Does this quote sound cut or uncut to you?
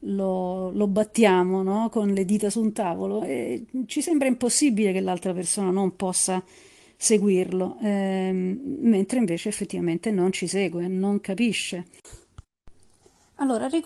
uncut